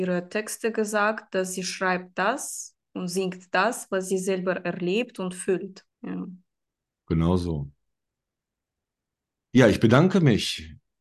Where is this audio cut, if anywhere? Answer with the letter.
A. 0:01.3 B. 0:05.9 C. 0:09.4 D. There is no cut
B